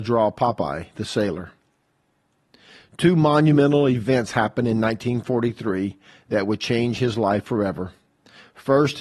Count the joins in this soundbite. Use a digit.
0